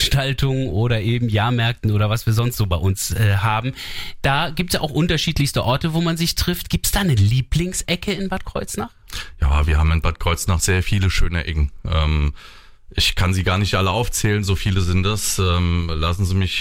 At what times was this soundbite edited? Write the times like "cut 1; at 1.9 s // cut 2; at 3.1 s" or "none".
none

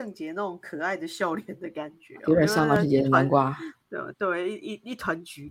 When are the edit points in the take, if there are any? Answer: none

